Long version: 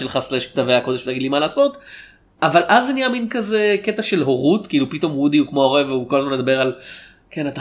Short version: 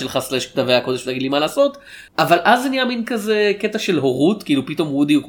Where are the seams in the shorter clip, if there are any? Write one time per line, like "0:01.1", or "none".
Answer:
0:02.1